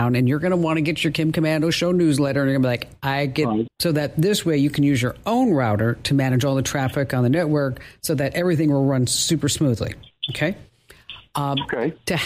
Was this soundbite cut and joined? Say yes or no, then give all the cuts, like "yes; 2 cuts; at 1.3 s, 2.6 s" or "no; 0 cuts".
yes; 1 cut; at 3.7 s